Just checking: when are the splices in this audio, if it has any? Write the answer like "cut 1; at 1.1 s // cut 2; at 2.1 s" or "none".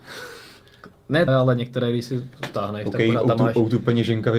cut 1; at 1.3 s

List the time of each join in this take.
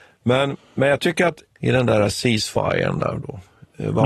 cut 1; at 1.5 s

